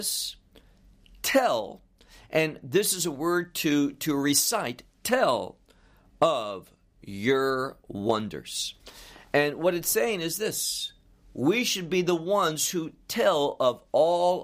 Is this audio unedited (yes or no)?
yes